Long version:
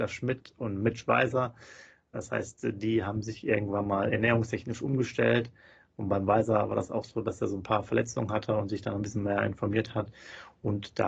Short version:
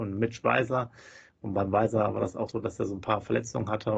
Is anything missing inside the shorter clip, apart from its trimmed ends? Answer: yes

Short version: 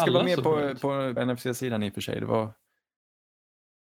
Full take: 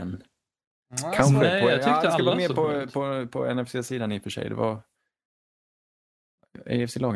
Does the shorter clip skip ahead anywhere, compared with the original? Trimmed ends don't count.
yes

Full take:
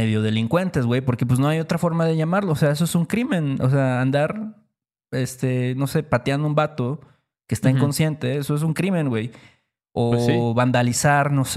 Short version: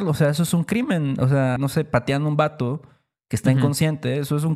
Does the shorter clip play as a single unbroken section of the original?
no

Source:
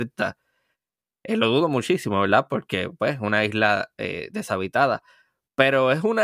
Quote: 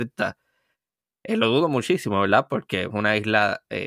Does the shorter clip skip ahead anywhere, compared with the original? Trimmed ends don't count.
yes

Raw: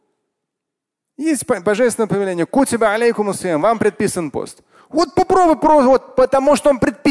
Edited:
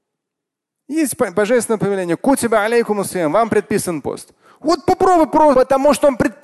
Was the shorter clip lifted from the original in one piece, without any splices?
no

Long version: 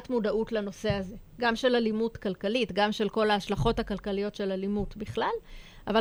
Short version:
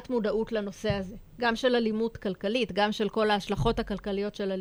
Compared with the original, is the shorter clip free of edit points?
yes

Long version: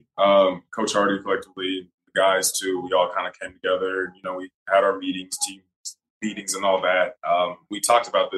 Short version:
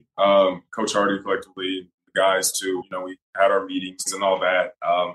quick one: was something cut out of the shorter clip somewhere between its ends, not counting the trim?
yes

